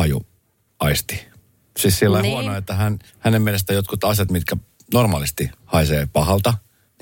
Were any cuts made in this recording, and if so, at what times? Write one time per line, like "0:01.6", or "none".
0:03.1
0:05.6